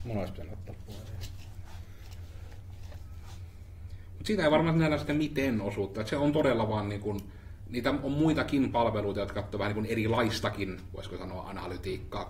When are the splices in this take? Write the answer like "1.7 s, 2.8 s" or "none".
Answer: none